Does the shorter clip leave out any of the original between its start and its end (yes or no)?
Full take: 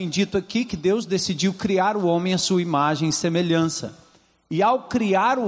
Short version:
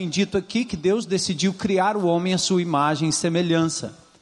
no